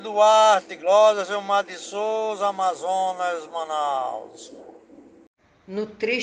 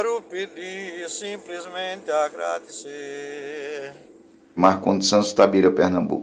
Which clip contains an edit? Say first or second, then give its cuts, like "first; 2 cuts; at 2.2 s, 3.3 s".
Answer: second; 1 cut; at 4.6 s